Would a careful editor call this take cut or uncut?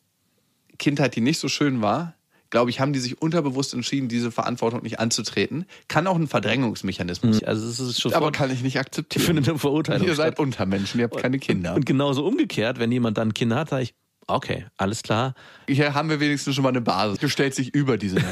cut